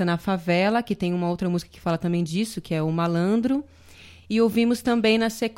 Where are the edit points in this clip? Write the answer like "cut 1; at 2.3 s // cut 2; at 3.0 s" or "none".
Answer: none